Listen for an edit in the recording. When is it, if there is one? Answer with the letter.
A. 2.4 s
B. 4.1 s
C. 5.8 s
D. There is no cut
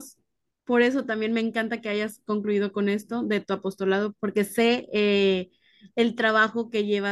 B